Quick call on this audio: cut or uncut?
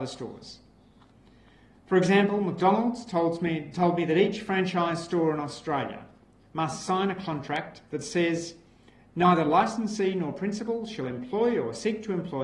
uncut